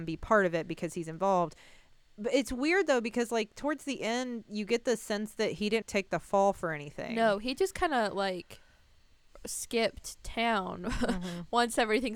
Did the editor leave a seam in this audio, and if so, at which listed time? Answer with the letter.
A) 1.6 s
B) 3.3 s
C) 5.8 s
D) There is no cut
C